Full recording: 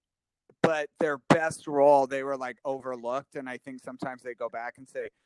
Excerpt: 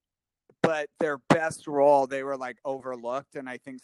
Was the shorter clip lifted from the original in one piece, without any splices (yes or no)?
yes